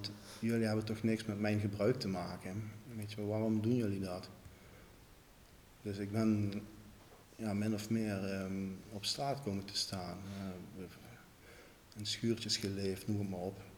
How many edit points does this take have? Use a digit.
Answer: 1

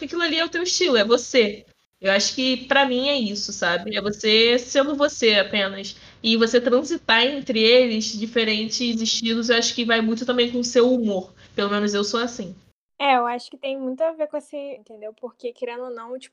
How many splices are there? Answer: 1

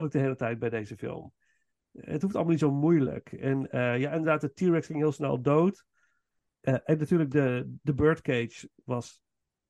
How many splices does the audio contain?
1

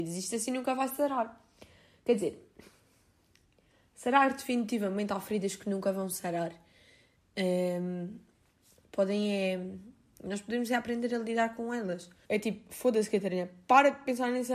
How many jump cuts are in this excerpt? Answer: 1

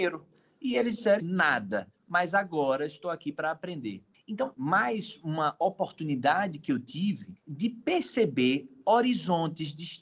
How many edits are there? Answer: 2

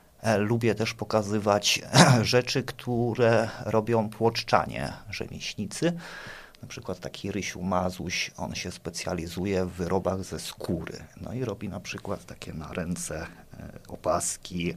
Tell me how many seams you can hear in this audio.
0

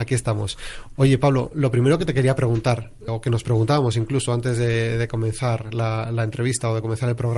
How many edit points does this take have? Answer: 1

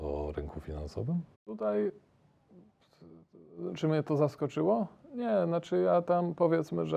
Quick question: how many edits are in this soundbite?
1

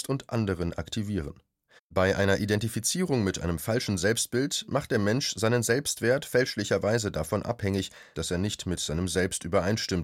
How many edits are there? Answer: 2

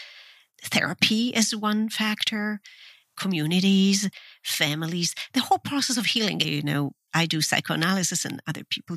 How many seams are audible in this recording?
1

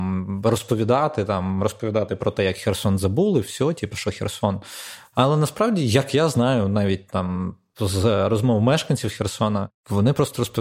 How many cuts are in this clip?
1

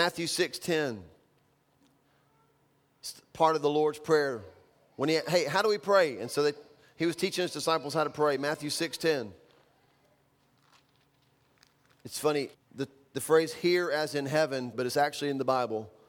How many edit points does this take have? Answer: 2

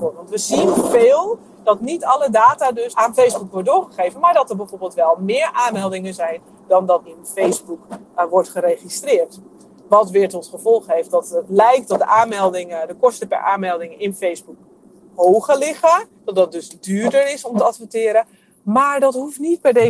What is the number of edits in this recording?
1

